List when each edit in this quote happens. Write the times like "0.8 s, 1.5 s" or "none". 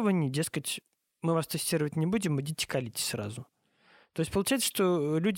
none

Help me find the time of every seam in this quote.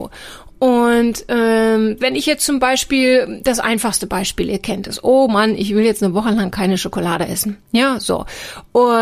none

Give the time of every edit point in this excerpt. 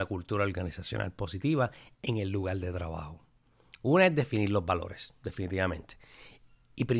none

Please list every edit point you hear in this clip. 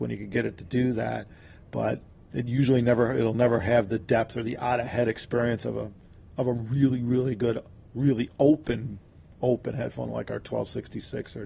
none

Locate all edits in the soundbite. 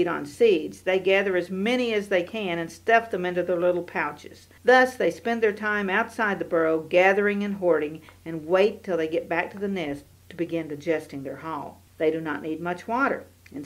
4.6 s, 11.9 s

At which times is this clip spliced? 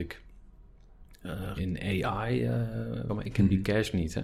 1.6 s, 3.1 s

